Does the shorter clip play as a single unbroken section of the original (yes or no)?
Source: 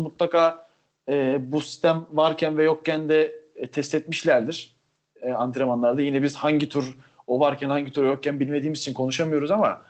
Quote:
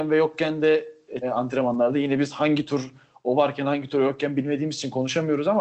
no